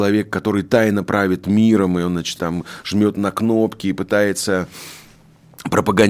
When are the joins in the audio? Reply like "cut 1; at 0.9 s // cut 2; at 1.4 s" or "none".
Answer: cut 1; at 2.4 s